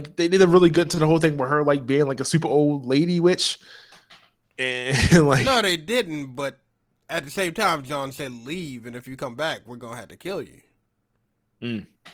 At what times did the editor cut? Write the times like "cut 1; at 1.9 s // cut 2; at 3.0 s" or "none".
none

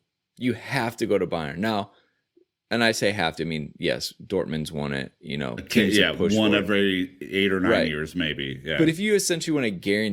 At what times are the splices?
none

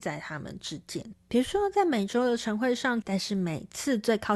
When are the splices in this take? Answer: cut 1; at 1.1 s // cut 2; at 3.0 s

